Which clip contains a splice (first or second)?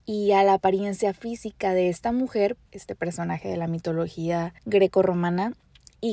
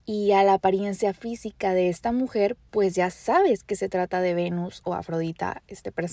first